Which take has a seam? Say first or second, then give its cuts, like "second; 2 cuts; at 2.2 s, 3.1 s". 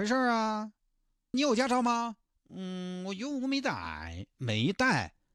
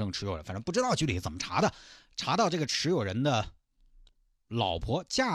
first; 1 cut; at 1.3 s